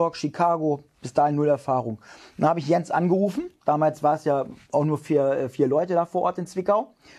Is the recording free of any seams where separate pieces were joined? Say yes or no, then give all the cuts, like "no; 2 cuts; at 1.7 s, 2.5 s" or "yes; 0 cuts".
yes; 0 cuts